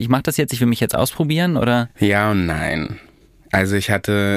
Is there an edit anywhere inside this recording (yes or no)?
no